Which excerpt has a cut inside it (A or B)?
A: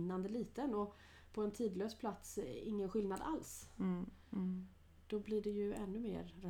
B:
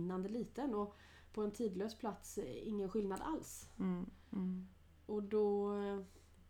A